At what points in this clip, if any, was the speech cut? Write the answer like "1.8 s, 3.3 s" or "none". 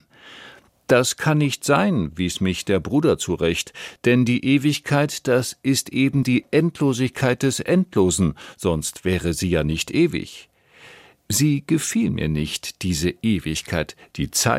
none